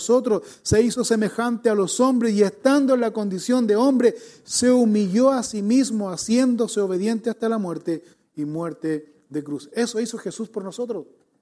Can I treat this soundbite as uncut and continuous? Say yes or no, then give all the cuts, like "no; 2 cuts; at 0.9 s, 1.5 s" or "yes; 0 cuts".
yes; 0 cuts